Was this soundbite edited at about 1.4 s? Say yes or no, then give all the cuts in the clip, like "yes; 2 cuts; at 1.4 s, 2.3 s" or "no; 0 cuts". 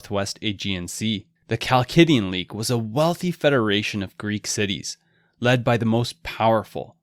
yes; 1 cut; at 1.4 s